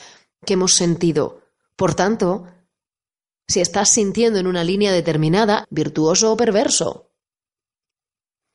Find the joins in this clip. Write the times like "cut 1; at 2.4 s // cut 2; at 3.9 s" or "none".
cut 1; at 5.6 s